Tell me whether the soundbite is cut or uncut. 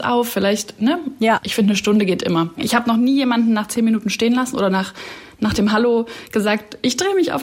uncut